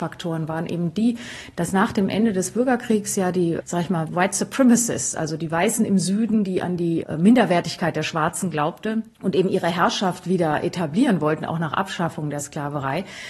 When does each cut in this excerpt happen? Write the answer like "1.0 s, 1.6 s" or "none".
none

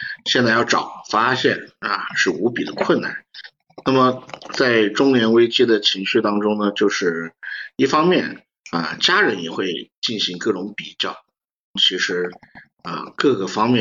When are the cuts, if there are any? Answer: 11.8 s

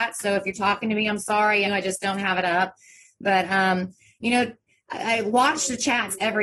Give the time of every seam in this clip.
1.6 s

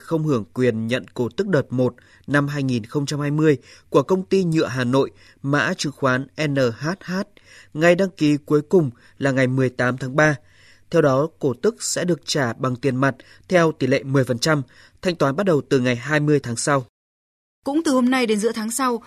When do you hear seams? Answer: none

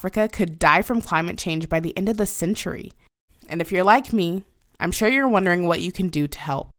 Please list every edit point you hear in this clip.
3.3 s

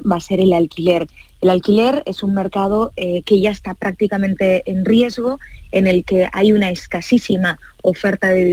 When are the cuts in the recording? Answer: none

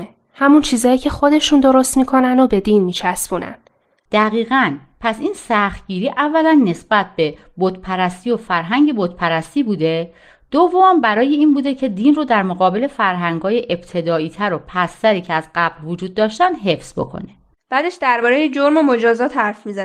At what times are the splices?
4.0 s, 17.6 s

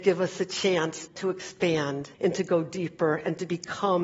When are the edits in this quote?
1.1 s, 2.1 s

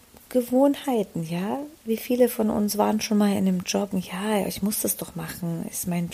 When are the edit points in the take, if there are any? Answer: 3.9 s

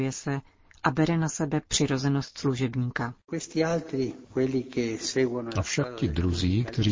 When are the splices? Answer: none

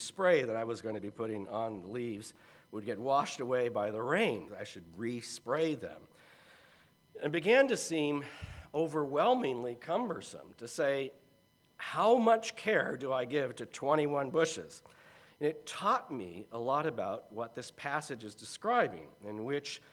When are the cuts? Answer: 4.5 s, 15.3 s

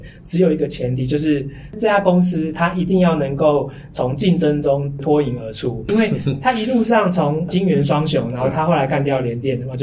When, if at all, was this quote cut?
5.9 s

